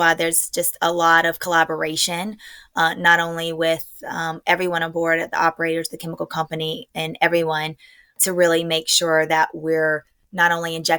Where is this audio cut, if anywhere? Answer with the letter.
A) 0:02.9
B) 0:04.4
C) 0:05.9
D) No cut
D